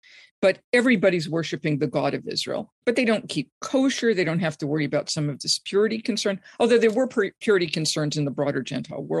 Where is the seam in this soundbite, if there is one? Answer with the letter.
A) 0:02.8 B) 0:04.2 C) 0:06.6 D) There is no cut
A